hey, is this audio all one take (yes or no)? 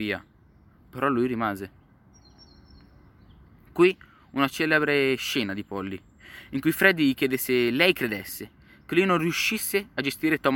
yes